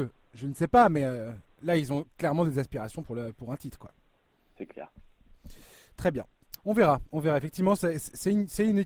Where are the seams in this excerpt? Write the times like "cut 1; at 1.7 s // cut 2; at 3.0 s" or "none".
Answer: cut 1; at 6.6 s

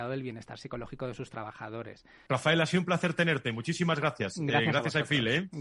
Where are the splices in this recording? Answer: cut 1; at 2.3 s

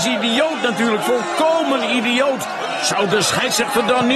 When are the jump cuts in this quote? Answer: none

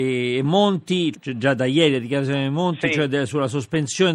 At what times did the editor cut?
cut 1; at 1.1 s

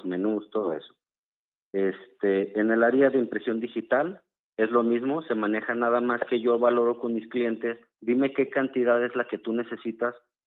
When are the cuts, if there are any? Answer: cut 1; at 7.9 s

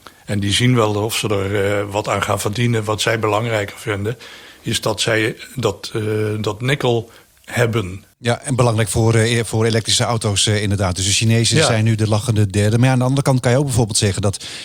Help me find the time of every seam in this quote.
none

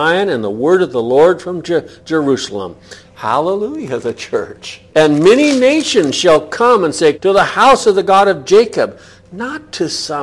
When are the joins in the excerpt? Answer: cut 1; at 3.0 s // cut 2; at 4.9 s // cut 3; at 7.1 s

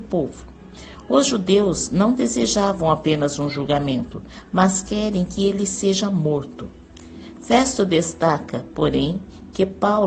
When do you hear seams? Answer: none

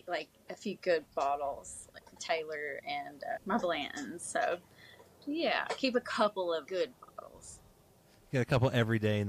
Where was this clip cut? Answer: cut 1; at 3.4 s // cut 2; at 6.7 s

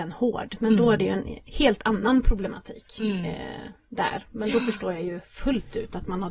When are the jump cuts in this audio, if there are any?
cut 1; at 1.4 s

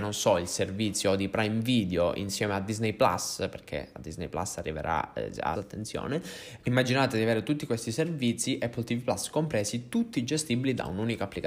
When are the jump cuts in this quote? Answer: cut 1; at 5.5 s // cut 2; at 6.6 s

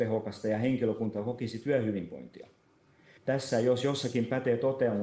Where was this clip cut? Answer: cut 1; at 3.2 s

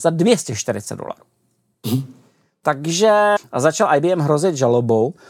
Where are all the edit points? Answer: cut 1; at 3.4 s

